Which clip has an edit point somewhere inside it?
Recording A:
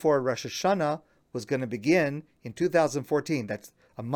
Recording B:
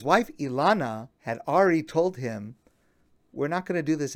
B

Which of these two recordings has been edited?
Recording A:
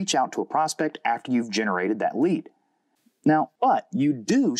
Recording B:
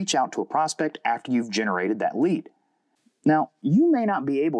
A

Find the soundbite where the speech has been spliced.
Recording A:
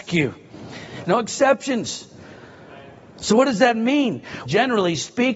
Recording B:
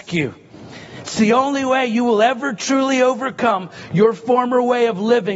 A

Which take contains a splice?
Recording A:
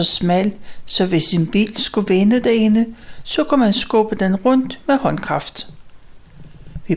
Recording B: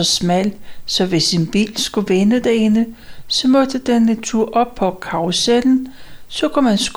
A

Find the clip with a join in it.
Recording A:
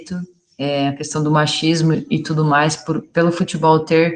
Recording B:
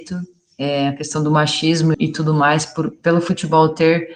B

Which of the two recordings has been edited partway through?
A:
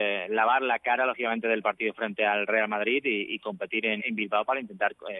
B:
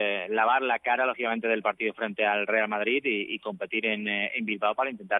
A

